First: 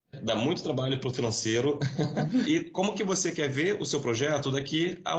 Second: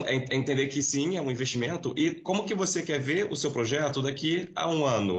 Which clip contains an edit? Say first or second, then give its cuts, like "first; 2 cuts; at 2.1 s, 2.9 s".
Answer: first; 1 cut; at 2.4 s